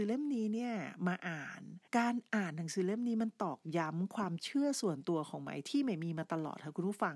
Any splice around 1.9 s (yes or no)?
yes